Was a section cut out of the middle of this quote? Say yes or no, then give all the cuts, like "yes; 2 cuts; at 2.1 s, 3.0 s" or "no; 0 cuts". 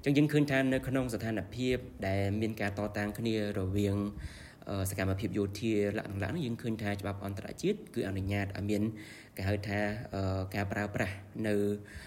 no; 0 cuts